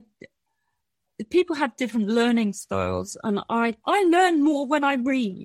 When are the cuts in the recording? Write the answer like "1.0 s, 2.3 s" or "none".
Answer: 3.8 s